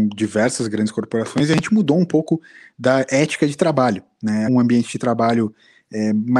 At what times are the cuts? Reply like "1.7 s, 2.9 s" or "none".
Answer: 4.5 s

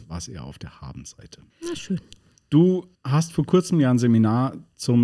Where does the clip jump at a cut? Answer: 1.5 s, 3.0 s

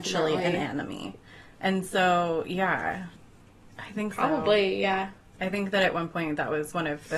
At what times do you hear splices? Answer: 3.7 s

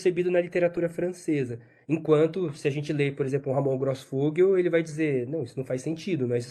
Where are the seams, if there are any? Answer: none

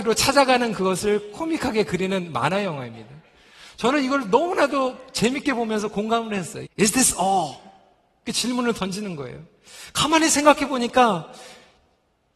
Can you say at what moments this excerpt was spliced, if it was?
6.6 s

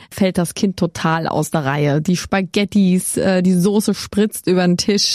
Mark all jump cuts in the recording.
none

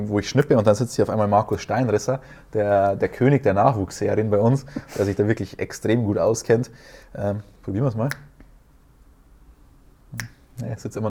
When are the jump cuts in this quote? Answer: none

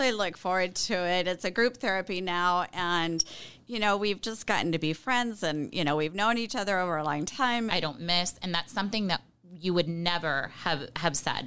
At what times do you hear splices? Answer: 7.7 s

